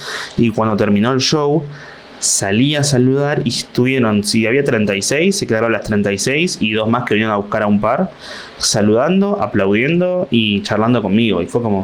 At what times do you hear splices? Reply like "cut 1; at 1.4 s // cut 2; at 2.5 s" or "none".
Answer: none